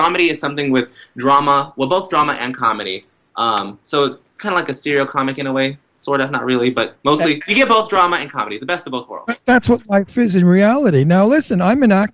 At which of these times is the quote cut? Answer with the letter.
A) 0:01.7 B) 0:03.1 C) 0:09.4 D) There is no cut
D